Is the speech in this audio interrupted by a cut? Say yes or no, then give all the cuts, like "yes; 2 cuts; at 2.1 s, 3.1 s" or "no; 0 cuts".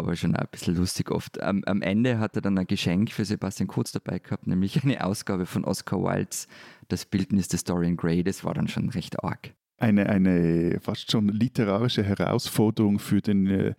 no; 0 cuts